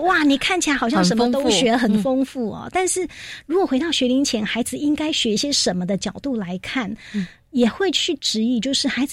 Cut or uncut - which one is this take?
uncut